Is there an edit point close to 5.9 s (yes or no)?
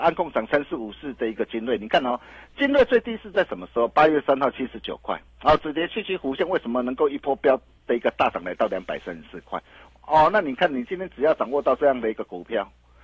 no